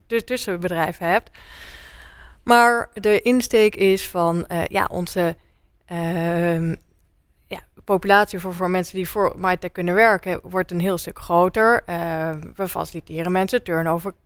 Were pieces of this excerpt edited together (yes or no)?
no